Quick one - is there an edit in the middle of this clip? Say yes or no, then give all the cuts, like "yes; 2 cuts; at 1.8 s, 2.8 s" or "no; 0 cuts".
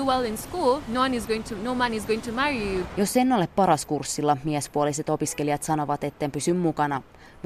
no; 0 cuts